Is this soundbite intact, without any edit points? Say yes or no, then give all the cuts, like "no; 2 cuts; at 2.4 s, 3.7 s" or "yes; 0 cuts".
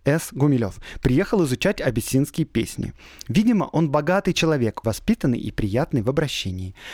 no; 1 cut; at 4.8 s